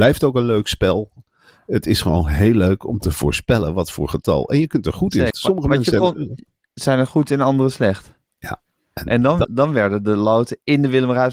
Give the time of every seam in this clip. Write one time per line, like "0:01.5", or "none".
0:05.3
0:08.3
0:09.4